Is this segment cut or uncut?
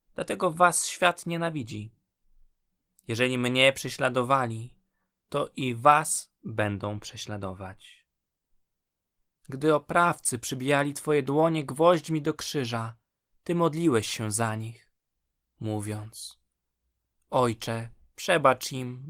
uncut